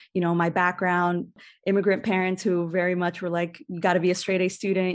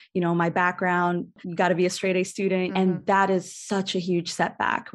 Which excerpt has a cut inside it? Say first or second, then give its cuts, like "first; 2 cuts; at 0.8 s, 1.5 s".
second; 2 cuts; at 1.4 s, 2.7 s